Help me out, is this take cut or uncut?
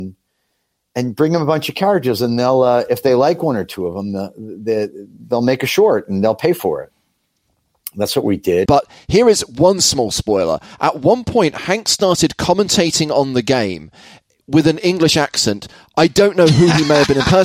cut